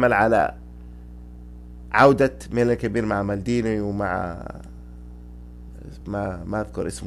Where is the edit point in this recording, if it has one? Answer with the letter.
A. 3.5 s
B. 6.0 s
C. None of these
C